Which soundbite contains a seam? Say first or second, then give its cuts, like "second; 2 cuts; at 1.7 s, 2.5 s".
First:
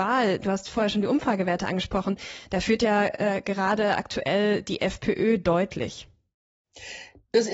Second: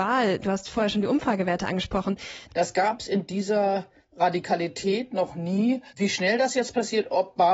second; 2 cuts; at 2.5 s, 5.9 s